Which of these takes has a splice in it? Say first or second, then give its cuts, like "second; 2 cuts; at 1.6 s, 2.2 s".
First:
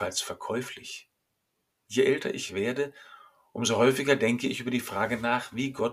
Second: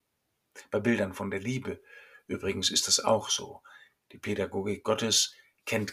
second; 1 cut; at 4.0 s